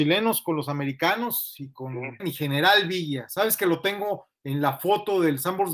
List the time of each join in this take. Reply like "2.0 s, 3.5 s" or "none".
2.2 s